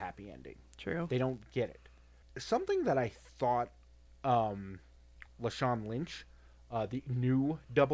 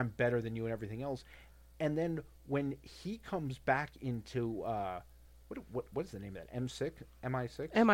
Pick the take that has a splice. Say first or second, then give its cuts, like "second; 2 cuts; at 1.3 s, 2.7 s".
first; 1 cut; at 5.3 s